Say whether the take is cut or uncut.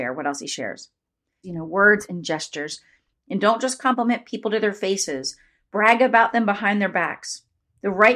cut